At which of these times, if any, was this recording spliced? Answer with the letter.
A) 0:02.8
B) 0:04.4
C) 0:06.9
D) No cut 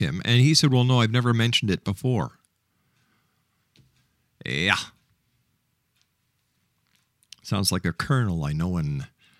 D